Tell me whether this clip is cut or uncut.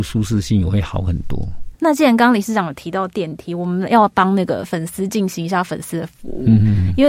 cut